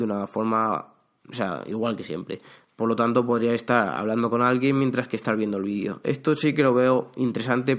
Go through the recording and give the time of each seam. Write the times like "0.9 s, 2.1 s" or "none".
none